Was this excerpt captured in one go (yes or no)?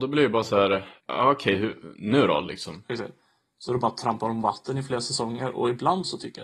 no